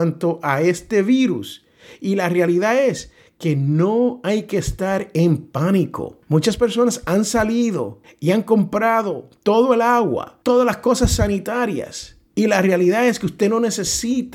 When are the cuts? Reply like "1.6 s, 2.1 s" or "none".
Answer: 10.4 s

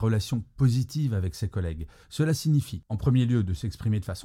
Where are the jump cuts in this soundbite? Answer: 2.0 s

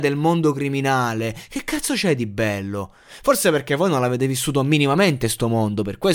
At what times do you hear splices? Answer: none

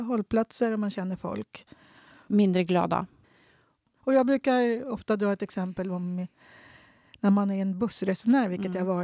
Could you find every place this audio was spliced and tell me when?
2.3 s

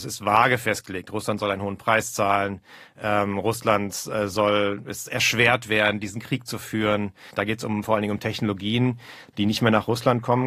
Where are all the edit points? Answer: 7.3 s

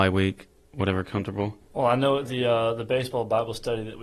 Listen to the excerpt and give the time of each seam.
1.6 s

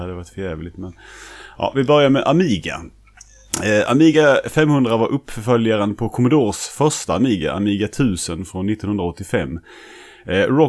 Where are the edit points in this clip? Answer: none

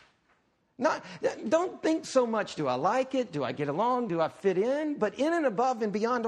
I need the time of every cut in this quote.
none

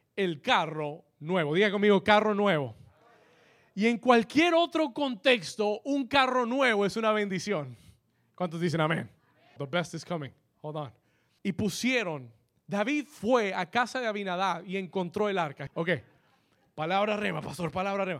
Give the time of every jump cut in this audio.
9.6 s, 11.4 s, 15.7 s

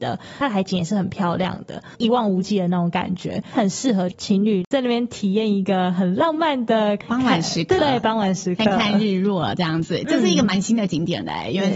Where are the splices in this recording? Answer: 7.8 s

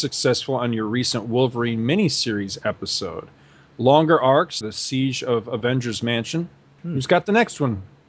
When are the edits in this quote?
4.6 s, 6.8 s

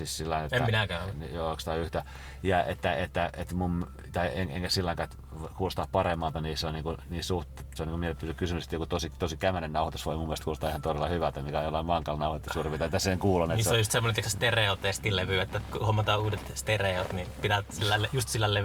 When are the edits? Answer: 7.8 s

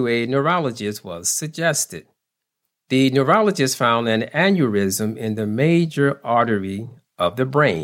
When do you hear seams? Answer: none

